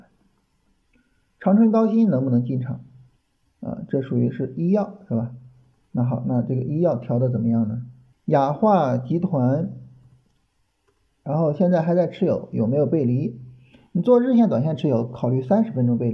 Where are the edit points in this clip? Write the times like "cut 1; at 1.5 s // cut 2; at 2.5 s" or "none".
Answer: cut 1; at 8.1 s